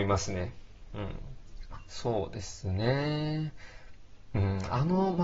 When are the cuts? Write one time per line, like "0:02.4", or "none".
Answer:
0:01.9